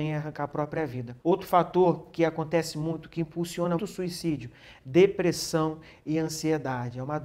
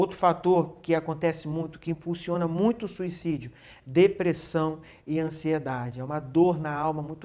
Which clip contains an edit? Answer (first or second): first